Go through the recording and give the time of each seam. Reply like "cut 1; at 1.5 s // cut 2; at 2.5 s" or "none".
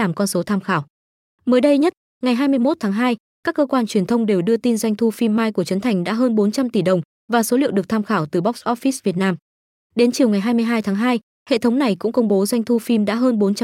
none